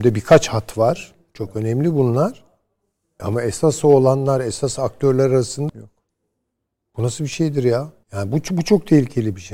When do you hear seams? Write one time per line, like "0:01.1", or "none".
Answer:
0:05.7
0:08.0

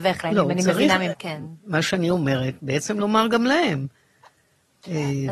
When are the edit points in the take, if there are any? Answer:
0:01.1

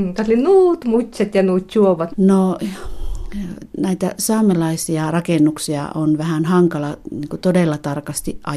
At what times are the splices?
0:02.1

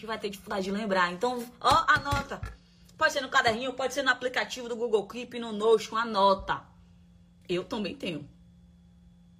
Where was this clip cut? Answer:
0:07.4

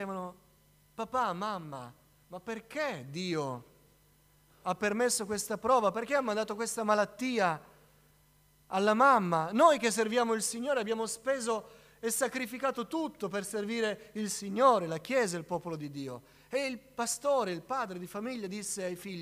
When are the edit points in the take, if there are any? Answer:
none

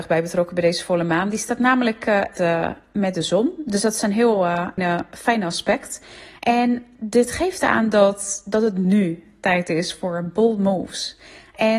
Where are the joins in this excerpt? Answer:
0:02.4
0:04.8

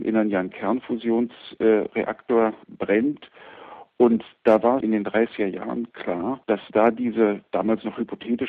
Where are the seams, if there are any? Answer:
0:02.6
0:04.8
0:06.4

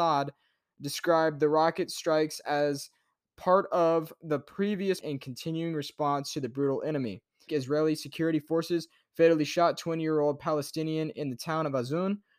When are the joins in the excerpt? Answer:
0:05.0
0:07.5

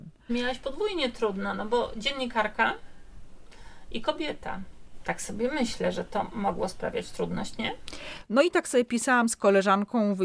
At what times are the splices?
0:08.3

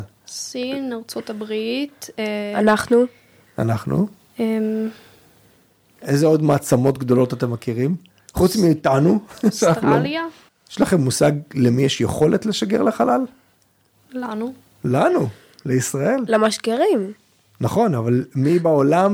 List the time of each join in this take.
0:10.5

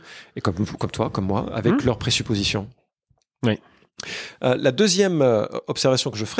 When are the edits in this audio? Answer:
none

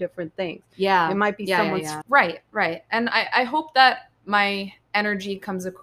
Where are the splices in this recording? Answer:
0:02.0

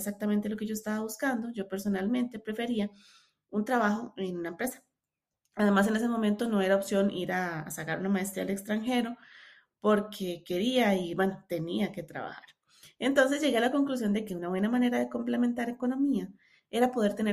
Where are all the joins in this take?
none

